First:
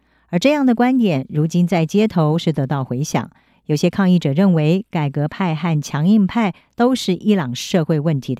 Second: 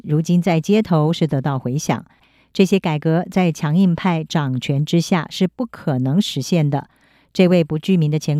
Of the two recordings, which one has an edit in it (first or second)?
second